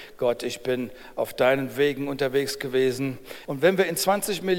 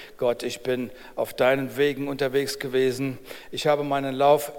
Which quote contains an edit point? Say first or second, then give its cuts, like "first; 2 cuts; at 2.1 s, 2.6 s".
first; 1 cut; at 3.5 s